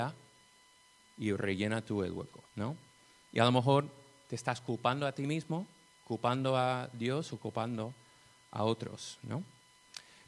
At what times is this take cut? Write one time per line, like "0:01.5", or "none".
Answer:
0:02.5